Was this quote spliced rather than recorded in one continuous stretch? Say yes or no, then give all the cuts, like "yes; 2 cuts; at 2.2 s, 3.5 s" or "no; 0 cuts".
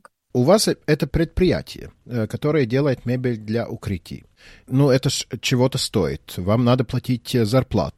no; 0 cuts